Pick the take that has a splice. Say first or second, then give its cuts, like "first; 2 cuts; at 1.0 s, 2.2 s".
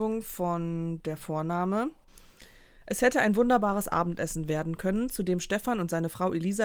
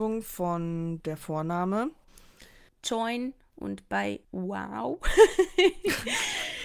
second; 2 cuts; at 2.7 s, 4.2 s